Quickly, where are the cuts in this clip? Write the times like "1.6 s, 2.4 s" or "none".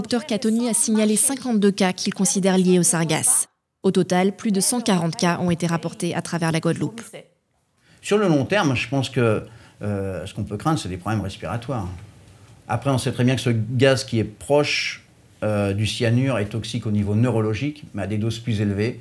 none